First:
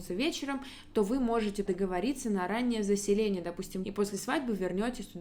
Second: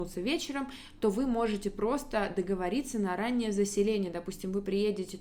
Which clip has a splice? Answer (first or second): first